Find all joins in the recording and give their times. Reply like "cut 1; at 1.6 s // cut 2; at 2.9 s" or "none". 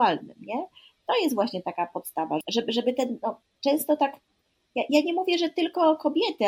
cut 1; at 2.4 s